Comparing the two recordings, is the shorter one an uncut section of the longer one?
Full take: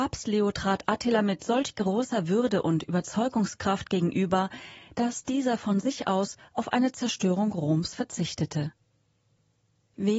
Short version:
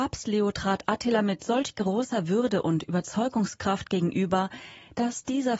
yes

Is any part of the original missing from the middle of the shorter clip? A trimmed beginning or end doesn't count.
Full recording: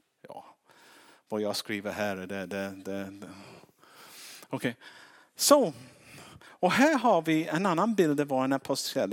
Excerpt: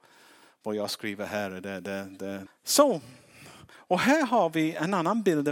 yes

